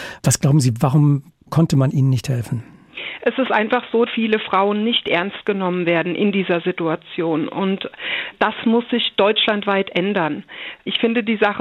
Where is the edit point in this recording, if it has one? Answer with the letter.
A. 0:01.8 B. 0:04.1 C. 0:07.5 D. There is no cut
B